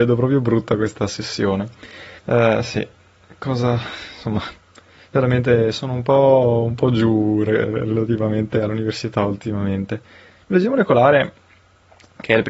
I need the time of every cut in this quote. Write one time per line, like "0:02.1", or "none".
0:02.2